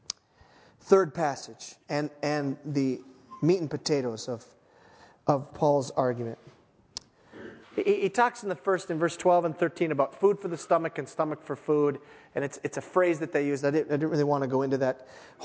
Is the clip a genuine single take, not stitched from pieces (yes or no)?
no